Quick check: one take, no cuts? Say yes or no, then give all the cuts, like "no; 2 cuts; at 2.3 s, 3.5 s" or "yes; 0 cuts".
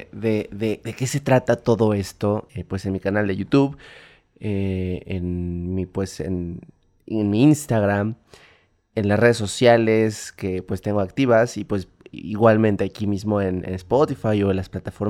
no; 1 cut; at 2.5 s